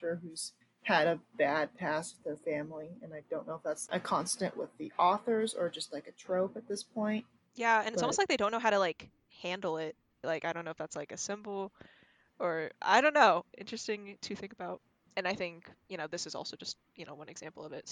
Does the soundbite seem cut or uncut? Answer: cut